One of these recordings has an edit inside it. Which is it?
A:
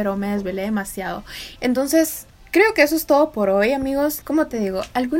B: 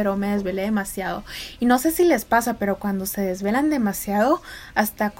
A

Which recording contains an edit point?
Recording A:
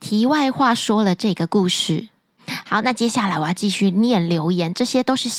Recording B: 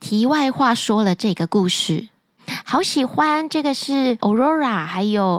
B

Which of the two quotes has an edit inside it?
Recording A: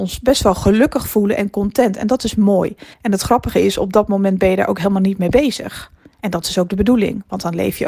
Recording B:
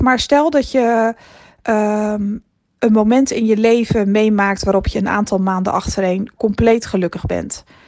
A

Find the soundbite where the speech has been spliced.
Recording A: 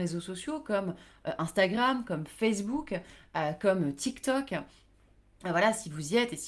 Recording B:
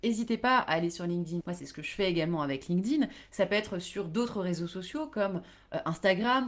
B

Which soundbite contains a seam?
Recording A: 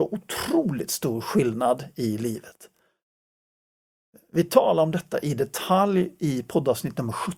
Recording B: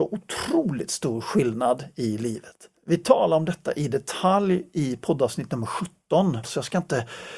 B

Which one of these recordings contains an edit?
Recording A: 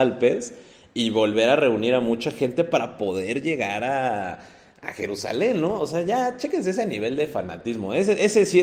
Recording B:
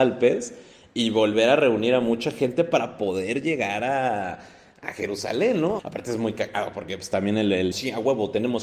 B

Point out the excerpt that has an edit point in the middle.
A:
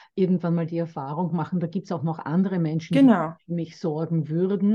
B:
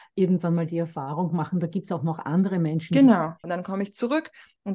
B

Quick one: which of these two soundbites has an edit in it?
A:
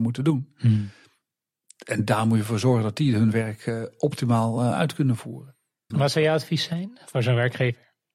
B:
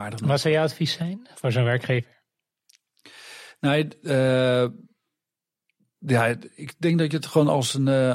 A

